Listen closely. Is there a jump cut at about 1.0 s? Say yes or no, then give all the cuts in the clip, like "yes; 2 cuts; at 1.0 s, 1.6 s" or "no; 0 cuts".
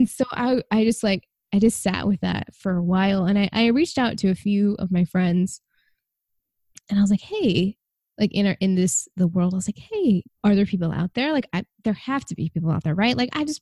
no; 1 cut; at 10.3 s